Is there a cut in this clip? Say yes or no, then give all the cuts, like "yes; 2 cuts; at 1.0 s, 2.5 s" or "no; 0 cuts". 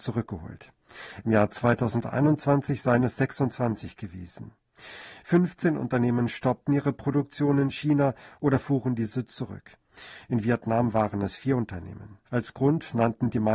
yes; 1 cut; at 12.3 s